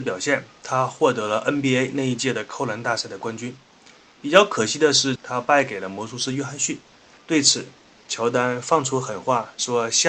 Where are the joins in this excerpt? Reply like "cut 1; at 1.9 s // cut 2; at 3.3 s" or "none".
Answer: cut 1; at 5.2 s // cut 2; at 7.1 s